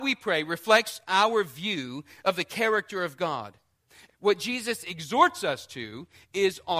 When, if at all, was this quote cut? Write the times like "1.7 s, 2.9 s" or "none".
4.1 s